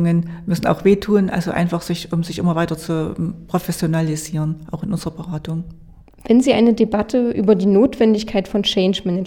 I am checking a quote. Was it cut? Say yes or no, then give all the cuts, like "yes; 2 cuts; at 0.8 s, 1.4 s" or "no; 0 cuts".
no; 0 cuts